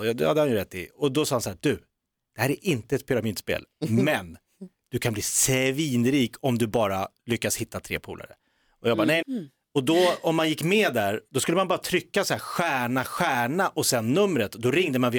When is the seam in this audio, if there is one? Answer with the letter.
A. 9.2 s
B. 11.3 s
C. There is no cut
A